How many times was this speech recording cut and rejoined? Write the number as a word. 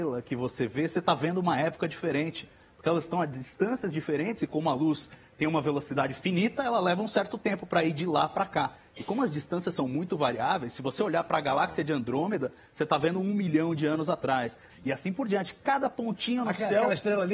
one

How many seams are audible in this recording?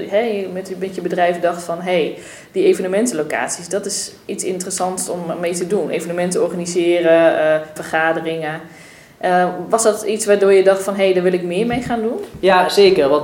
one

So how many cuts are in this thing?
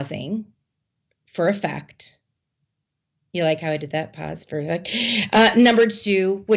zero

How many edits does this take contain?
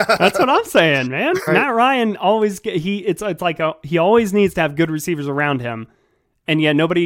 one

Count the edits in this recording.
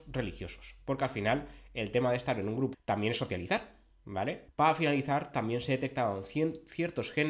two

